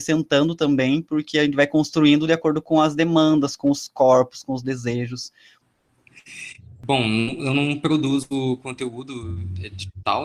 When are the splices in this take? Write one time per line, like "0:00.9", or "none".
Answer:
0:06.1